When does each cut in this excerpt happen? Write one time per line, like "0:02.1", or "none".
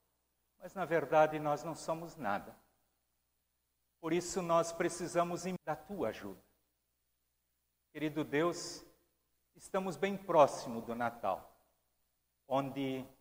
0:05.6